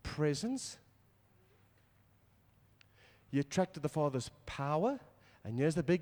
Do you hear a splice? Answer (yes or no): no